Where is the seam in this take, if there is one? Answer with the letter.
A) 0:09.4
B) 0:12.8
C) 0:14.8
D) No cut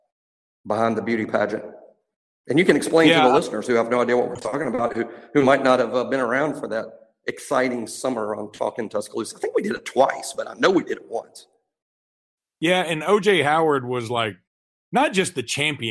C